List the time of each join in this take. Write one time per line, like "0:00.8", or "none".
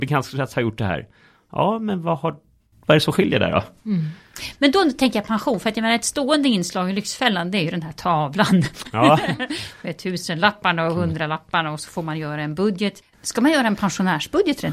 none